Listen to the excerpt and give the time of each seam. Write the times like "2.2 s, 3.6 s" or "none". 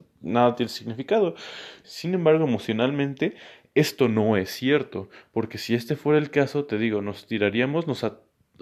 1.8 s